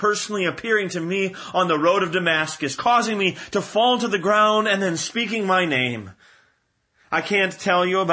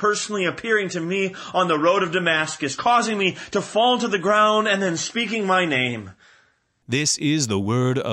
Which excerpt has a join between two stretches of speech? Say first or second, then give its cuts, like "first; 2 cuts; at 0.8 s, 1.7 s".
second; 1 cut; at 6.8 s